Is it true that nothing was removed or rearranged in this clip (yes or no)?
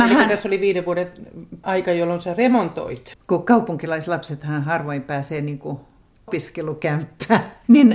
no